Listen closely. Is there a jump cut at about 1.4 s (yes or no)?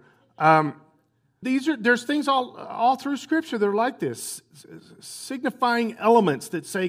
yes